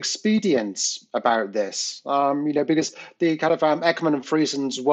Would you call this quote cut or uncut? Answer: uncut